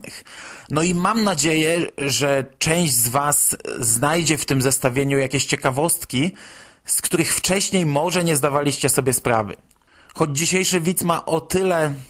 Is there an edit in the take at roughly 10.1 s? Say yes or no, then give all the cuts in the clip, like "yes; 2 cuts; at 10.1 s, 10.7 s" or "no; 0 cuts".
no; 0 cuts